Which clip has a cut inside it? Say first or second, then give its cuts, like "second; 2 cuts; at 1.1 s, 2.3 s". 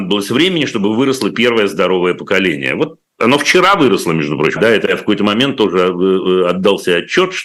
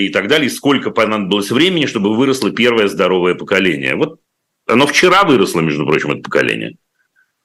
first; 2 cuts; at 3.1 s, 4.6 s